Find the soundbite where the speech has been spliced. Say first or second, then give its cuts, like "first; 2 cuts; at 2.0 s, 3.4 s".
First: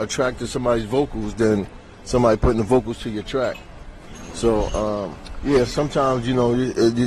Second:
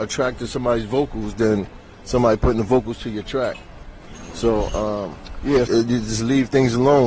second; 1 cut; at 5.7 s